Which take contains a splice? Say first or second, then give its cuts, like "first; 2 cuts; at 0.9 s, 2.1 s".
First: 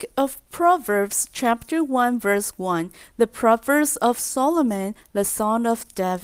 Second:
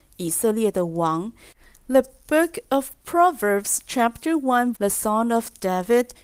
second; 1 cut; at 4.7 s